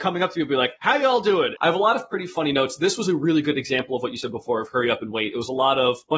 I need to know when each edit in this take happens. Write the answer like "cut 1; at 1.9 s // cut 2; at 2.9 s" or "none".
cut 1; at 1.6 s

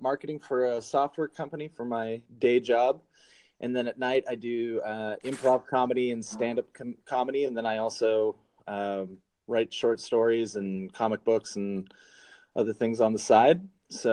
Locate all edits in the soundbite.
none

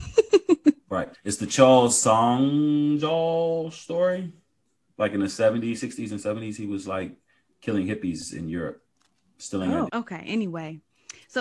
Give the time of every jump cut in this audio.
cut 1; at 1.1 s // cut 2; at 9.9 s

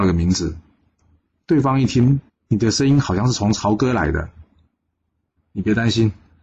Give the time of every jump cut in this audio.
cut 1; at 2.3 s // cut 2; at 5.4 s

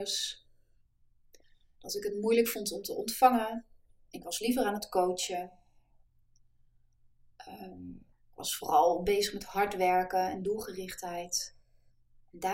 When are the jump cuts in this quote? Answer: cut 1; at 8.1 s

